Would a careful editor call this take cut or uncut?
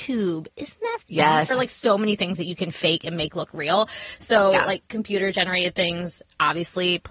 cut